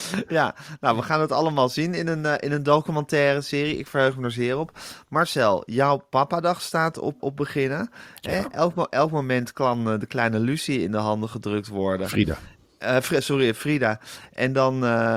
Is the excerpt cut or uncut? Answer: cut